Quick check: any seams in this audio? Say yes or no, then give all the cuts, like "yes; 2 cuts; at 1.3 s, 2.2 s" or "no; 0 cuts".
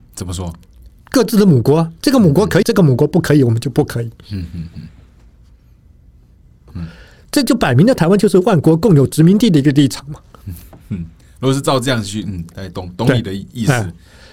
yes; 3 cuts; at 1.0 s, 2.6 s, 6.7 s